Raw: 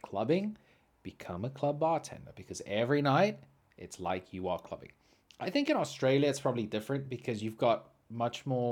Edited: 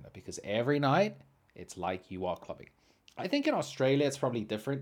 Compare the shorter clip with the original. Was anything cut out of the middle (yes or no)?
no